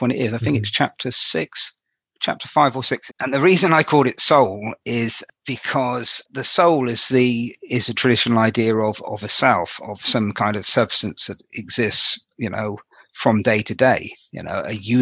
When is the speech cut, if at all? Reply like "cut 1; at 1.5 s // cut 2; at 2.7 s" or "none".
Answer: cut 1; at 3.1 s